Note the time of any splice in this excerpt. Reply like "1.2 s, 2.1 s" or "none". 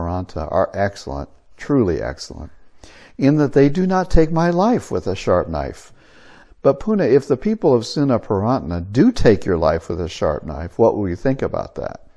6.4 s